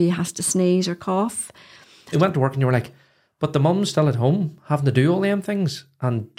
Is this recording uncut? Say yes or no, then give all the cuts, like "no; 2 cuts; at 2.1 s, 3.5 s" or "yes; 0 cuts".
no; 1 cut; at 2.1 s